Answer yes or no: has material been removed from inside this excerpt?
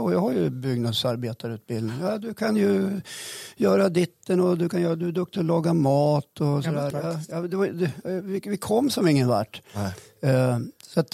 yes